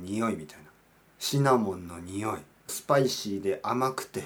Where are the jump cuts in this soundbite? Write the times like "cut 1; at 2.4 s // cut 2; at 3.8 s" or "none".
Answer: cut 1; at 2.7 s